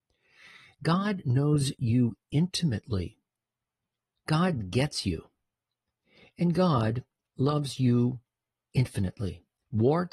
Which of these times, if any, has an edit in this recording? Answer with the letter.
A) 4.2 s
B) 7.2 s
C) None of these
B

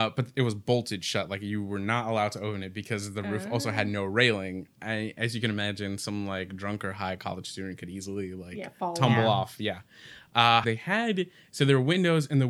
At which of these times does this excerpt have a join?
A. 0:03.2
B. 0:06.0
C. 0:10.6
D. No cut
C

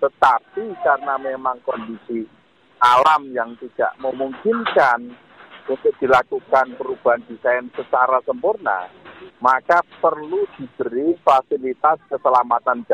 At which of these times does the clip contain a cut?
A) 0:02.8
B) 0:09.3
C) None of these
B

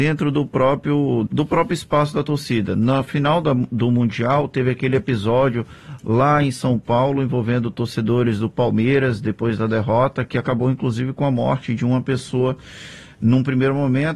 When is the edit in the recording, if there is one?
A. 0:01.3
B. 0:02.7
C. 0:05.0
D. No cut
A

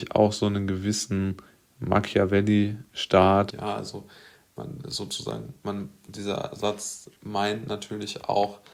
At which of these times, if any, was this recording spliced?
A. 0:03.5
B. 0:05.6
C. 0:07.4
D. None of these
A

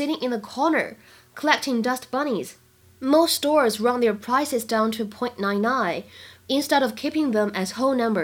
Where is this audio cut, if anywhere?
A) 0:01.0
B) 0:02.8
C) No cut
B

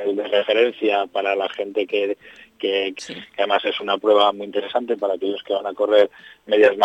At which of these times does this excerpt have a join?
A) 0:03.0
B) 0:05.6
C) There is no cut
A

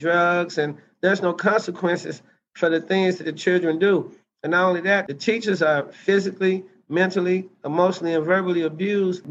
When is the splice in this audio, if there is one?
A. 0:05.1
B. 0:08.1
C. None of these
C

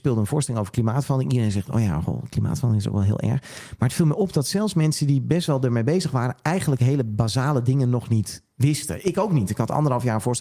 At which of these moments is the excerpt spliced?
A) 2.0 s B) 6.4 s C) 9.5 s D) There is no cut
D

